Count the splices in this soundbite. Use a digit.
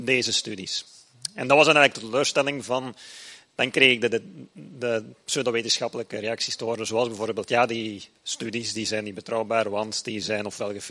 1